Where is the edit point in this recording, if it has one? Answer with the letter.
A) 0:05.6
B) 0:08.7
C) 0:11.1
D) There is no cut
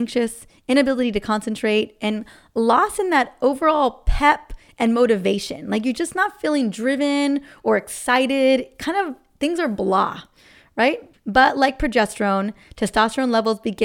C